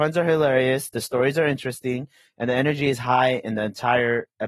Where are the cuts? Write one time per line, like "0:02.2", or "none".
none